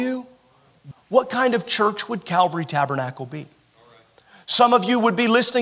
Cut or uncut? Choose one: cut